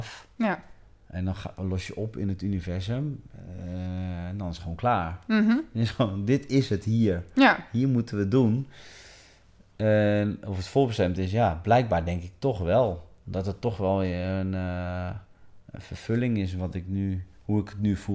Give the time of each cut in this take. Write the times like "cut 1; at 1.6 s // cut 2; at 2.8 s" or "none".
none